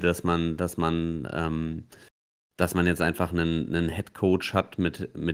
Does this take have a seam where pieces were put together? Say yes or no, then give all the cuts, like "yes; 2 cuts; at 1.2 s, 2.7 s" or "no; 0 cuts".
no; 0 cuts